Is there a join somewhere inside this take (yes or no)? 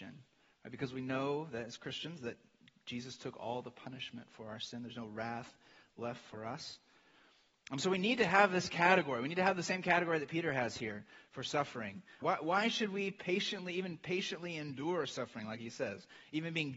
yes